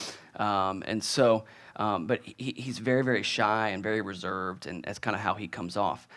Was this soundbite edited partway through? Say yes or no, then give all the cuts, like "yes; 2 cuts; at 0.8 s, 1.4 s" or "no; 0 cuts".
no; 0 cuts